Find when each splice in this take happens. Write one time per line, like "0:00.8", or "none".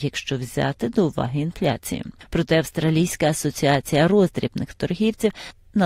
none